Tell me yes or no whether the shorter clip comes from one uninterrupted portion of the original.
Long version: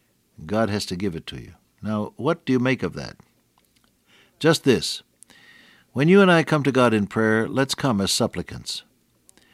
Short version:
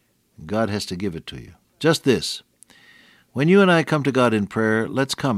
no